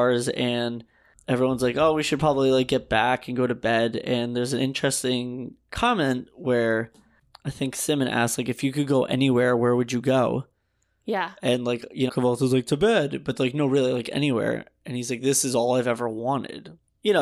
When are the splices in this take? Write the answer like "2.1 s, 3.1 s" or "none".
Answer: 12.1 s